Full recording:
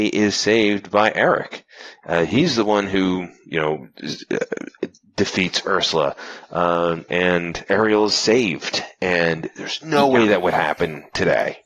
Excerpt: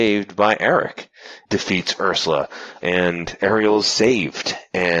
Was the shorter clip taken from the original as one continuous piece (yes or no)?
no